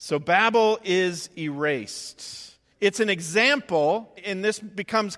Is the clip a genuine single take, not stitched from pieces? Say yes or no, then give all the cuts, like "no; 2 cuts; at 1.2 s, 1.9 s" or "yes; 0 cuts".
no; 2 cuts; at 2.7 s, 4.2 s